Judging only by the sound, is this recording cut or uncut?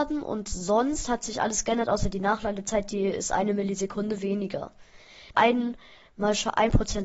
cut